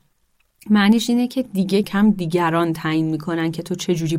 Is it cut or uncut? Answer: cut